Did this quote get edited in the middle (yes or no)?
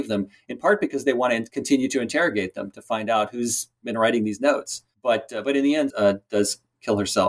yes